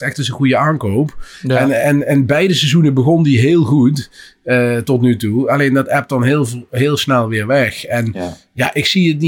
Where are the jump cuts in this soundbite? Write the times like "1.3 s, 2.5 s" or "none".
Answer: none